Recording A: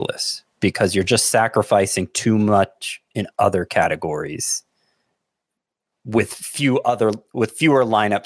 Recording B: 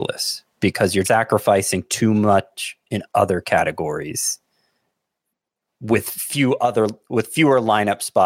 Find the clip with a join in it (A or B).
B